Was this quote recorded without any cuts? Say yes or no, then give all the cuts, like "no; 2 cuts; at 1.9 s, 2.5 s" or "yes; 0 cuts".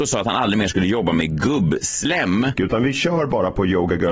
no; 1 cut; at 2.5 s